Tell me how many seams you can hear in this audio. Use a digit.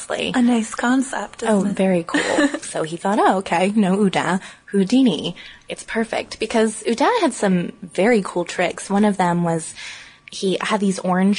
1